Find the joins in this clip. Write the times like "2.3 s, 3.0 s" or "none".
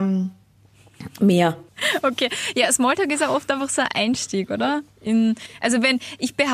none